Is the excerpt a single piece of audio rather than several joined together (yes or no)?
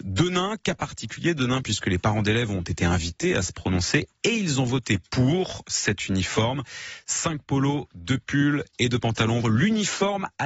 no